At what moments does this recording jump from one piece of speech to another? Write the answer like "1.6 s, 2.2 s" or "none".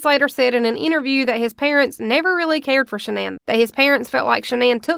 3.4 s